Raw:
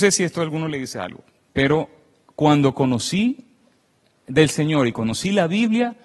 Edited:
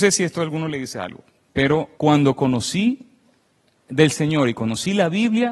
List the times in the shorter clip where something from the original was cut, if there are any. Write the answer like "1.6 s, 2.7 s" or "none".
1.9 s